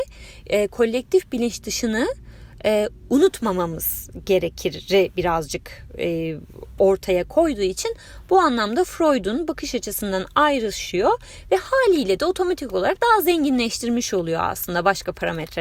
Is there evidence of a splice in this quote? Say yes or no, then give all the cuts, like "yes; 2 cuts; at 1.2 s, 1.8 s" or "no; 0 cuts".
no; 0 cuts